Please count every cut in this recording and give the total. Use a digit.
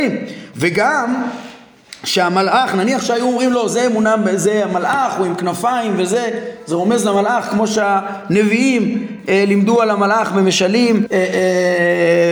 1